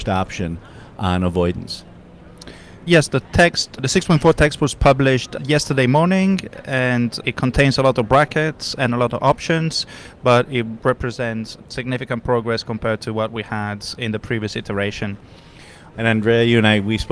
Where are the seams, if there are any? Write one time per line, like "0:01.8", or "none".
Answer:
0:15.9